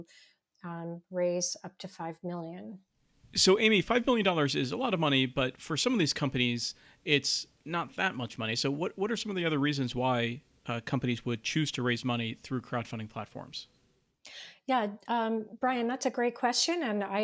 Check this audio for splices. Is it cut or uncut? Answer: uncut